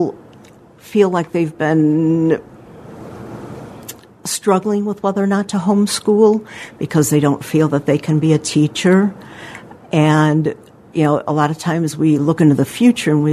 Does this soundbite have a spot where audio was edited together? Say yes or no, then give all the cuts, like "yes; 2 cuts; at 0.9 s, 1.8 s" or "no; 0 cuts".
yes; 1 cut; at 9.8 s